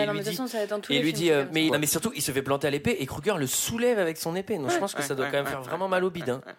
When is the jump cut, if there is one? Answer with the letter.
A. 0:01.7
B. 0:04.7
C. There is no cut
A